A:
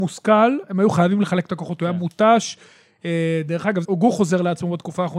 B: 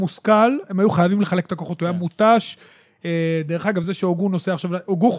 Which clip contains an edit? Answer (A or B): A